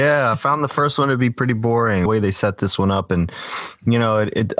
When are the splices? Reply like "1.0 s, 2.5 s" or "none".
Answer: 2.1 s